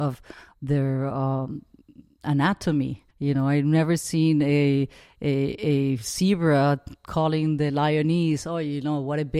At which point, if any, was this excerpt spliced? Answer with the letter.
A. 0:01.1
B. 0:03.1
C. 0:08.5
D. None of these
B